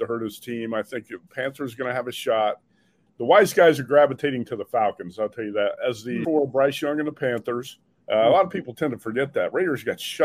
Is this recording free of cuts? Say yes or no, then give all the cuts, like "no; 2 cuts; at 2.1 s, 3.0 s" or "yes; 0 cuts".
no; 3 cuts; at 3.1 s, 6.2 s, 8.0 s